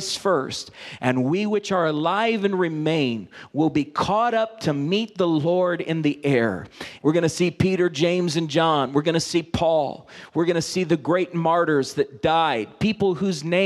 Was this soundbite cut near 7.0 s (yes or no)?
yes